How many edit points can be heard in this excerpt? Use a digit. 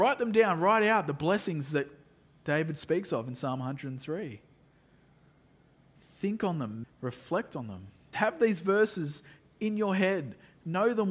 2